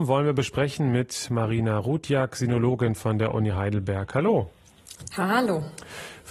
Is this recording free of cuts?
yes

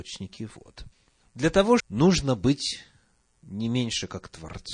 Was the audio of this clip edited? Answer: yes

